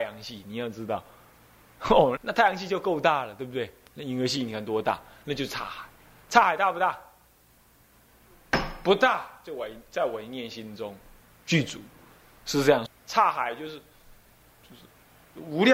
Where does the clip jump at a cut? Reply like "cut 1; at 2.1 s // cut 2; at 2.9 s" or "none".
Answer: cut 1; at 2.2 s // cut 2; at 12.9 s